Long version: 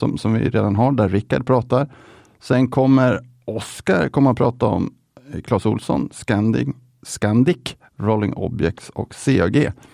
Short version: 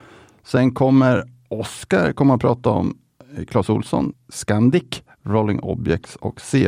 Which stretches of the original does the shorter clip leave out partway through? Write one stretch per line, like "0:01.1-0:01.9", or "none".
0:06.1-0:06.9

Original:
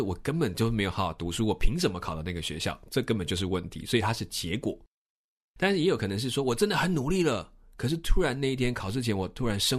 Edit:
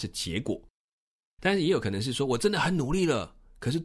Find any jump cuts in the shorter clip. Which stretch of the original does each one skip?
none

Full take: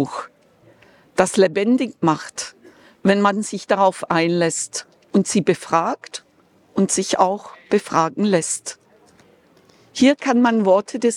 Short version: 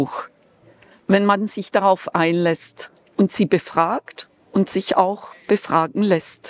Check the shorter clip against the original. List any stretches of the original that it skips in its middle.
0:00.9-0:02.9
0:06.3-0:06.6

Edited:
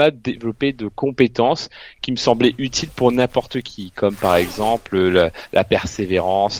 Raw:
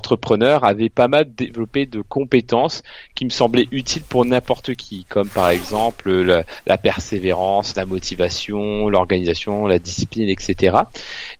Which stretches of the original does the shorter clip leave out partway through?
none

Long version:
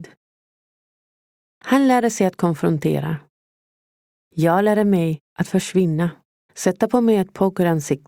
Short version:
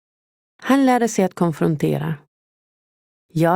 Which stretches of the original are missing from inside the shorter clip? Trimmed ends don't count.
none

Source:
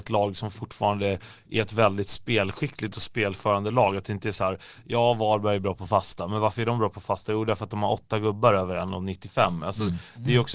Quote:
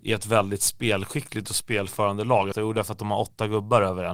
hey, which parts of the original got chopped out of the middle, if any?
0:04.0-0:07.2

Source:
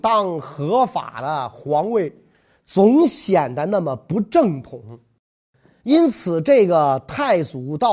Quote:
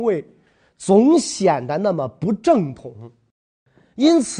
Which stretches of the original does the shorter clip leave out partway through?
none

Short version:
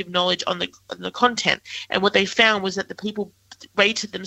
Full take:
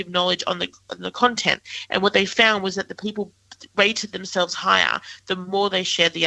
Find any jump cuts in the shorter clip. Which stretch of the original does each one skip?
none

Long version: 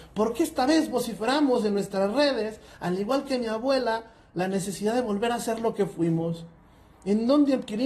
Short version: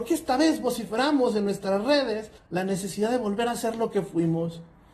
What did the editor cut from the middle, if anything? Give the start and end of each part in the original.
0:02.7-0:04.2

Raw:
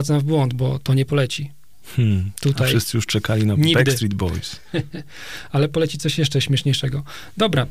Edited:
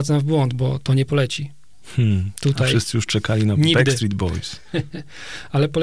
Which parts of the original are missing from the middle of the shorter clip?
none

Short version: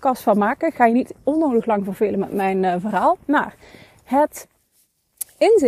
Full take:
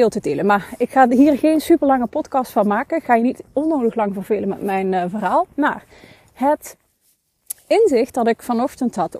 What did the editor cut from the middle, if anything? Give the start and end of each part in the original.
none

